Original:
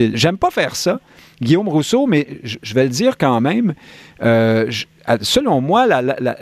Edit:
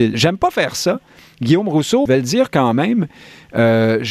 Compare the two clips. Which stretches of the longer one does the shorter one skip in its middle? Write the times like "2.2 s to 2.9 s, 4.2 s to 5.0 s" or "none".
2.1 s to 2.7 s